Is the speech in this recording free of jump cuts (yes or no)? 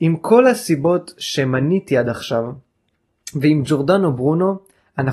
yes